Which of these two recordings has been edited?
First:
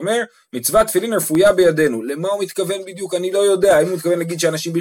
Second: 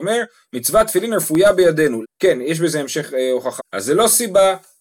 second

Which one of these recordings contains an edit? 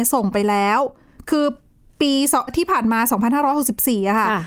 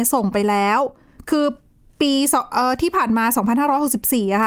first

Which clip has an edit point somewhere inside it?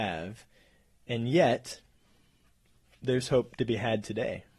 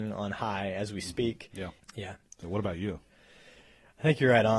second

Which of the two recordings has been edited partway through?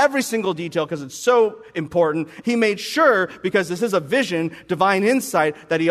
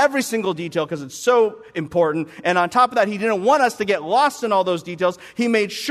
first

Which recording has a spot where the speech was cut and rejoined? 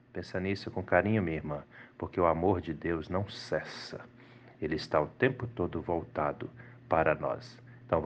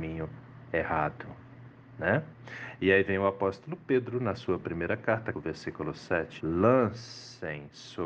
second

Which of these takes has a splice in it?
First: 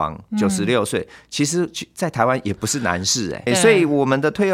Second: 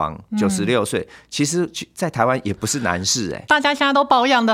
first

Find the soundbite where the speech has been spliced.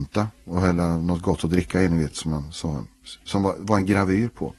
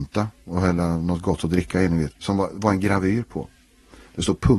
second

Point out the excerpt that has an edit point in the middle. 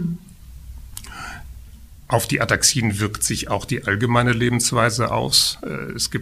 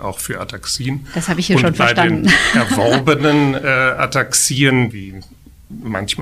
second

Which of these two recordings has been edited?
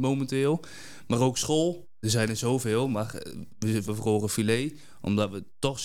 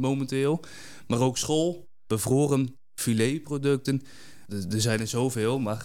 first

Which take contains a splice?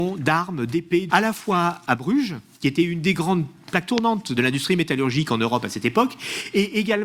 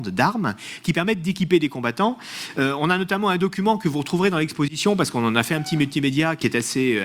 first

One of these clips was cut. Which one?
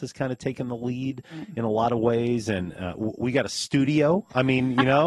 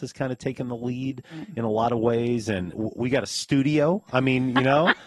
second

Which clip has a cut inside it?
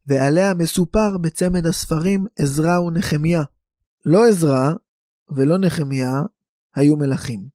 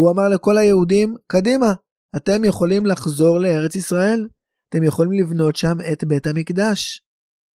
first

